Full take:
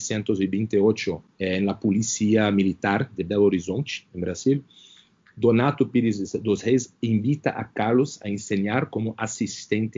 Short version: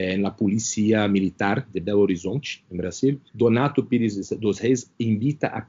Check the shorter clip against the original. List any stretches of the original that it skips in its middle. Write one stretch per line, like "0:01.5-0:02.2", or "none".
0:04.7-0:05.3